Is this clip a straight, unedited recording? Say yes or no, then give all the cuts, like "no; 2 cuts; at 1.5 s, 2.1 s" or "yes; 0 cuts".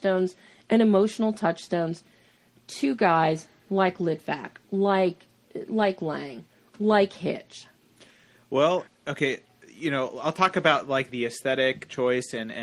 no; 2 cuts; at 8.9 s, 11.1 s